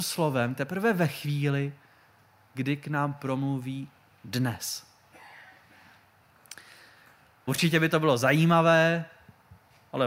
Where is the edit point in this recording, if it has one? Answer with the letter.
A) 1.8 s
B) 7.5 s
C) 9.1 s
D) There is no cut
B